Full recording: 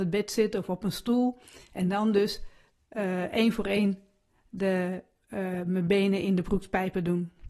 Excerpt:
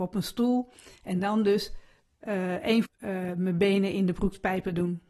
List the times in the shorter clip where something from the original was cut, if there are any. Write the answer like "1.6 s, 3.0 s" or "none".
2.8 s